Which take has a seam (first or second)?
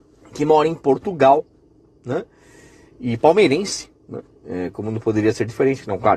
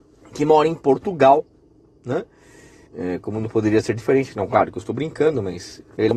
second